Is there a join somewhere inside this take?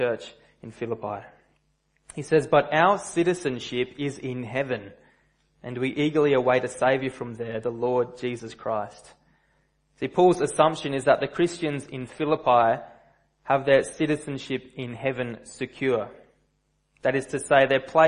no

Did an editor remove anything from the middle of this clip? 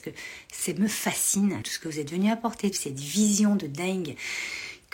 yes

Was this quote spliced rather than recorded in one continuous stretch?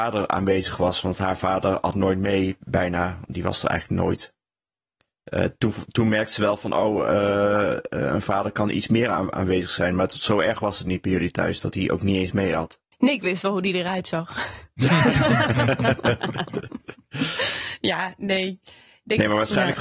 no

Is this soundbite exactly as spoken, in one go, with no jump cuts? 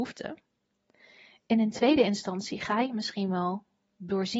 yes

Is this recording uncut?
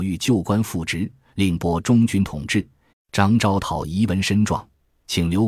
no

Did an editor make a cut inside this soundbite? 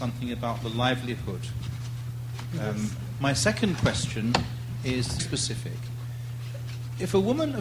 yes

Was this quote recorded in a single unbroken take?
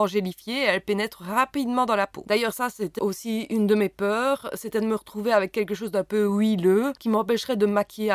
no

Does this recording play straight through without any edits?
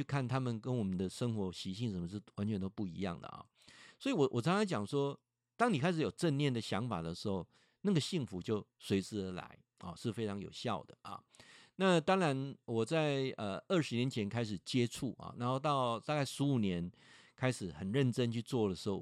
yes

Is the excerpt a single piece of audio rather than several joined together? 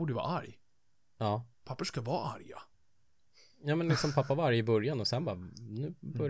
no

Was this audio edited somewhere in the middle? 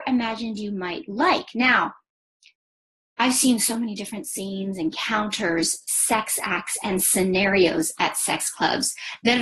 no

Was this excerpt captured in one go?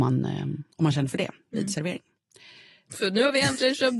no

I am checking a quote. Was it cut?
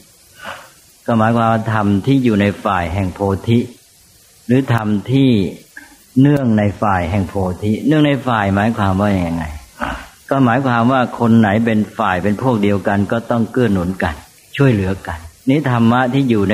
yes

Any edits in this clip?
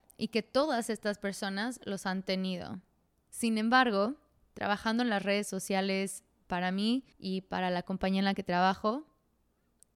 yes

